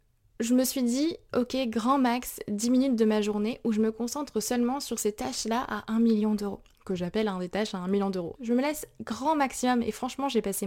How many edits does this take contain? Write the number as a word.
two